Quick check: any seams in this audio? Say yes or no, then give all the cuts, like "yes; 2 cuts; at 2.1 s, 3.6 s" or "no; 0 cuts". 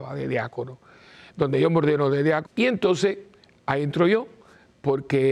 yes; 1 cut; at 2.5 s